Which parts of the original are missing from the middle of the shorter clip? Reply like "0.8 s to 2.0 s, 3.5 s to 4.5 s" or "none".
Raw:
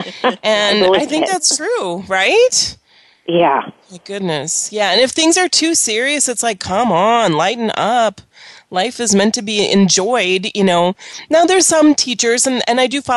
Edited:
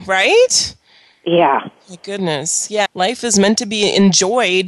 4.9 s to 8.6 s